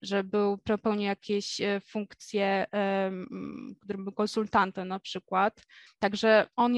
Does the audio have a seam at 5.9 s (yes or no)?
yes